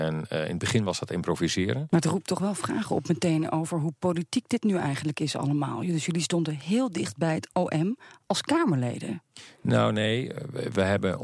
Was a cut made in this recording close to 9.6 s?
no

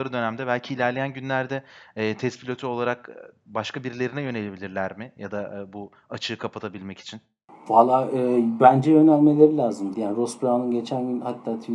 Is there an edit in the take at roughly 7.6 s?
no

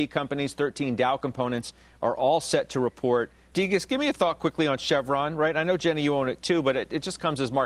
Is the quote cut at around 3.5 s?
yes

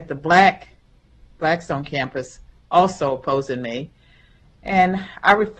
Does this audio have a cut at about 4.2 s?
no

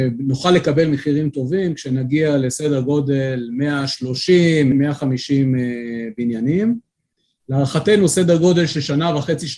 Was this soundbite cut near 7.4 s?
no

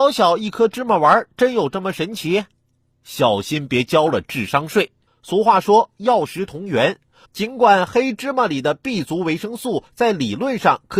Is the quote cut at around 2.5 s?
no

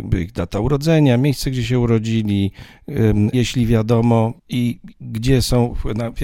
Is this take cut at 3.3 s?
yes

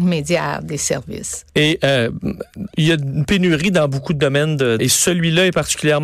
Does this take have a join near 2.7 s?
no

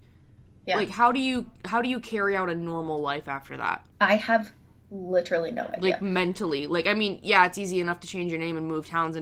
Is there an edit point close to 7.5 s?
no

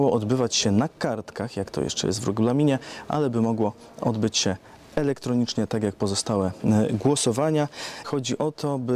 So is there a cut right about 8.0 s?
yes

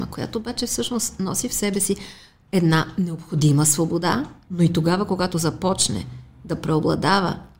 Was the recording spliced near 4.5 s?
yes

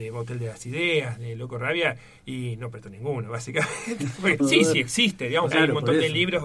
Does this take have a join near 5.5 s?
yes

